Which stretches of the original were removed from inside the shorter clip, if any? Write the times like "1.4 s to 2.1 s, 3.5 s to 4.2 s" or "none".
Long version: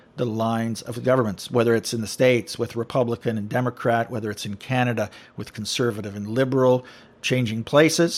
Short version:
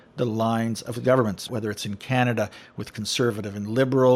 1.5 s to 4.1 s